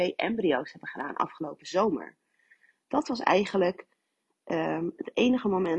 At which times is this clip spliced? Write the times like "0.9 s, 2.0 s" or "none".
none